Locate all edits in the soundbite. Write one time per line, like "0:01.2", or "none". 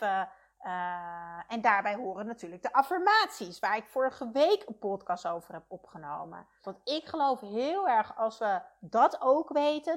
0:06.6